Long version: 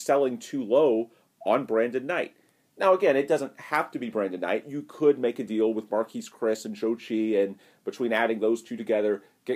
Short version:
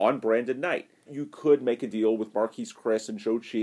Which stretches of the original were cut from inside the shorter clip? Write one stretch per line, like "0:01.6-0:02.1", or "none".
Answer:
0:02.5-0:04.6